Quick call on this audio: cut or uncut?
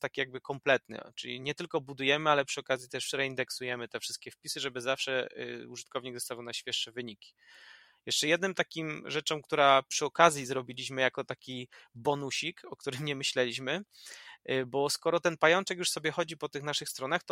uncut